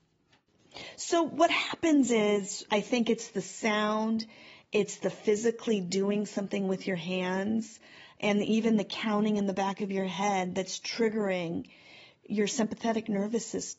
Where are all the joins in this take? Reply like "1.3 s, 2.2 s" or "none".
2.7 s